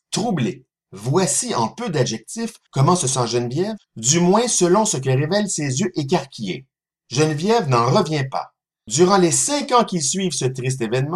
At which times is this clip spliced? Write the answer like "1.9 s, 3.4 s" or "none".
6.9 s, 8.7 s

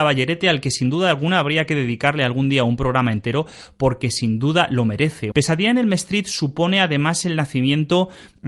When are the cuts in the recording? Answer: 5.3 s

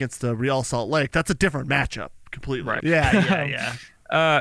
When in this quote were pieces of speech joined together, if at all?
2.8 s

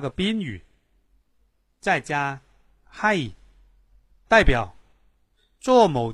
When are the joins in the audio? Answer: 4.1 s

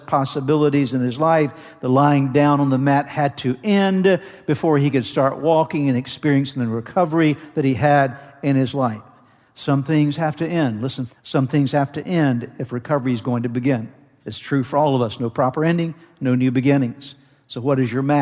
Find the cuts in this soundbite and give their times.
11.1 s, 14.2 s

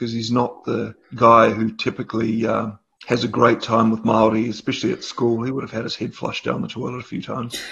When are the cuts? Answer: none

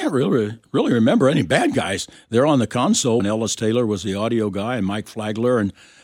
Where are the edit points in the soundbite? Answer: 3.2 s

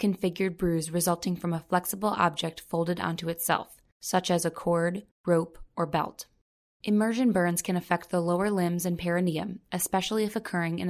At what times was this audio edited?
6.7 s

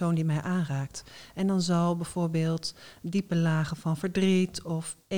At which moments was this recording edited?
none

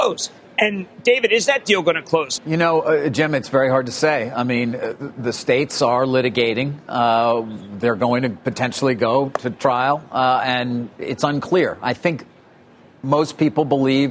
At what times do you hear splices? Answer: 2.4 s

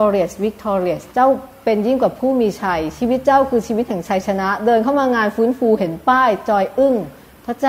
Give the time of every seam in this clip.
1.1 s

